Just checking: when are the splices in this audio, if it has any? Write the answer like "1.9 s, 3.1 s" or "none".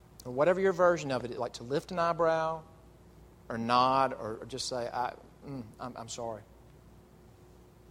none